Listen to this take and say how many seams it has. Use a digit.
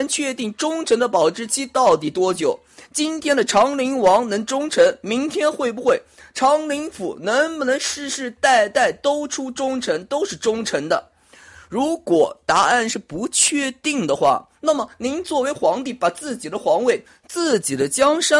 0